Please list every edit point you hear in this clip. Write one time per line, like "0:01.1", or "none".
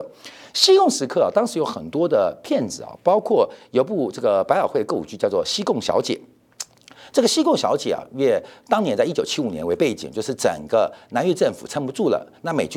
none